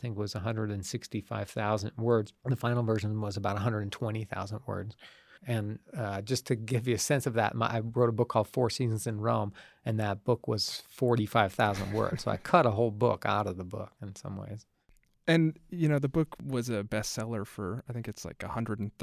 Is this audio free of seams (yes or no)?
no